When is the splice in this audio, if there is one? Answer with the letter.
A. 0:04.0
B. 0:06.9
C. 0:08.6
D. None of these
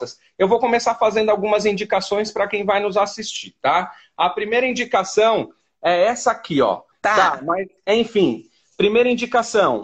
B